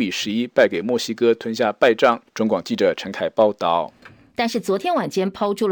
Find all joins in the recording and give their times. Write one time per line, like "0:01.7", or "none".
0:02.3
0:04.3